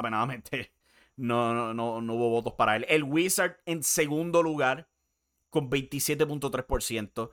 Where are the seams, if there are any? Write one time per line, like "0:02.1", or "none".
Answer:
none